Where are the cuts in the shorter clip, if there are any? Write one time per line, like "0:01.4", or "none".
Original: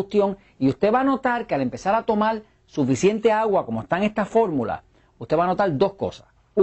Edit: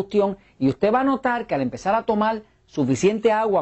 none